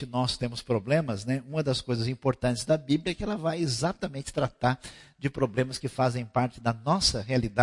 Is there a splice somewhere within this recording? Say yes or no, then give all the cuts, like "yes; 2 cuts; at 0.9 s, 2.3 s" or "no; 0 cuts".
no; 0 cuts